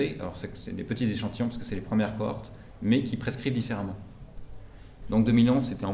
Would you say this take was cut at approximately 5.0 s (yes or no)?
yes